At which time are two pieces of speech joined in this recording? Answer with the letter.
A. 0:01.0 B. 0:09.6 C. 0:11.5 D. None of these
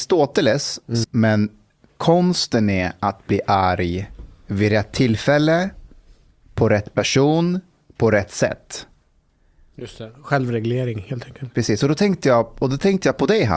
A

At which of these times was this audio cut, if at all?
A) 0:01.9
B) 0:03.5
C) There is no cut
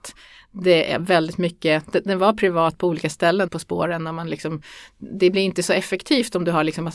B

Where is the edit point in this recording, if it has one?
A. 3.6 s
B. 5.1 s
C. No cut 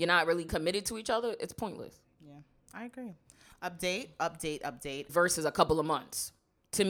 B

